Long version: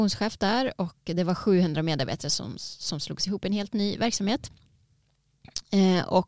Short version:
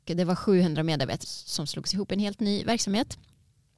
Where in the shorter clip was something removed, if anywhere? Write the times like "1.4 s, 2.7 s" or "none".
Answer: 1.2 s